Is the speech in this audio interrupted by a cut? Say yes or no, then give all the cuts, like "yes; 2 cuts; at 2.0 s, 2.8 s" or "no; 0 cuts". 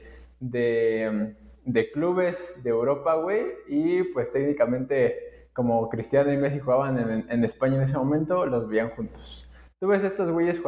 no; 0 cuts